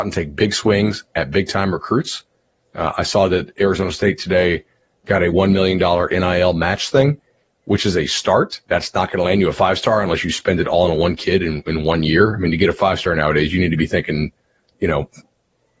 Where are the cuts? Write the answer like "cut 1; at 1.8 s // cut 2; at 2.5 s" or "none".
cut 1; at 8.6 s

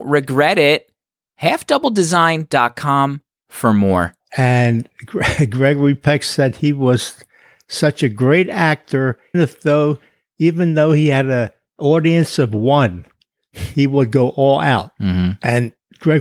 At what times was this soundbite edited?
cut 1; at 9.3 s

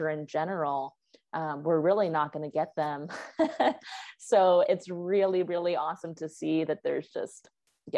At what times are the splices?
cut 1; at 4.6 s

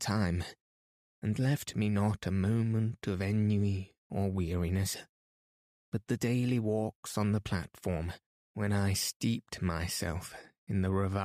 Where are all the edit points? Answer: cut 1; at 5.8 s

